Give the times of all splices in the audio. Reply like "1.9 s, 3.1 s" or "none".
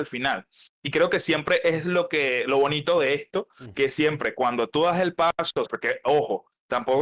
3.7 s, 5.7 s